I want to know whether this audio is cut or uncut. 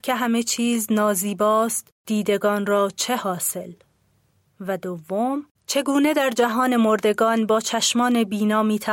cut